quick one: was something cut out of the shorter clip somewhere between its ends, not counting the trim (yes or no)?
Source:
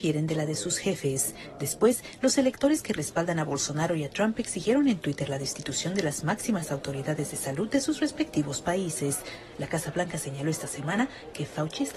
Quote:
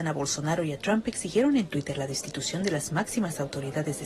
no